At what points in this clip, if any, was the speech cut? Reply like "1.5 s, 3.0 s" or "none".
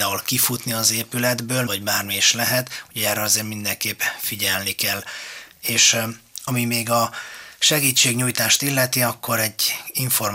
1.7 s